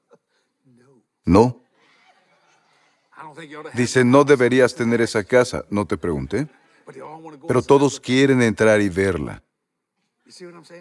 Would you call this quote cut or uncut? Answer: uncut